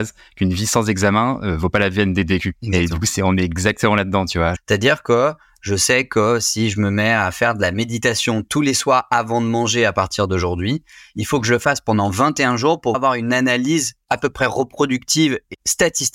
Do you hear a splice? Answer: yes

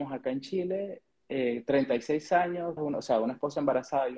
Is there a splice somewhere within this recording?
yes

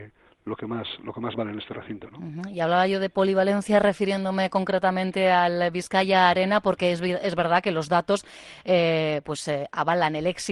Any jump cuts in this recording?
no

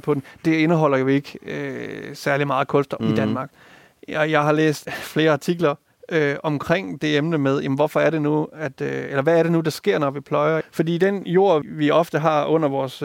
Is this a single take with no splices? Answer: no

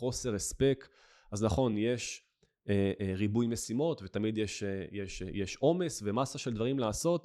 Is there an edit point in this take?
no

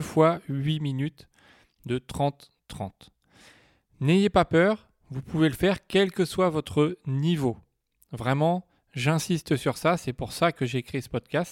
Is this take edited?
no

